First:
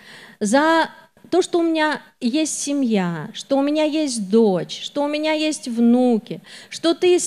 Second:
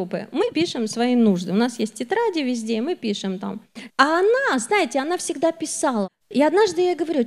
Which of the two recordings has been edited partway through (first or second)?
second